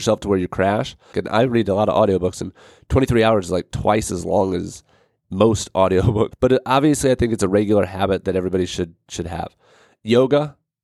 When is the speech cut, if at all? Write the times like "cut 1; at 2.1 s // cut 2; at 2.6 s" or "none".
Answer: cut 1; at 1.1 s // cut 2; at 6.3 s